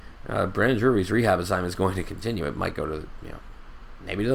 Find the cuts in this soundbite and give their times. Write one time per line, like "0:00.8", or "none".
none